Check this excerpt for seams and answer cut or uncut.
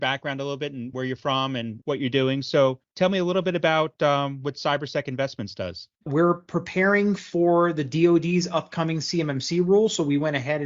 cut